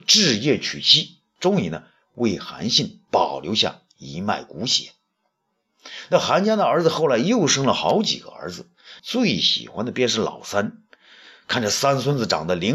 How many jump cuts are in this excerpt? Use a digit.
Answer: 1